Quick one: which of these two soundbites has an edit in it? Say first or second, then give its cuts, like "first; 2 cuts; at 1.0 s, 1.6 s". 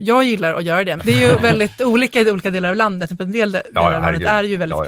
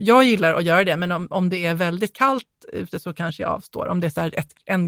first; 1 cut; at 1.0 s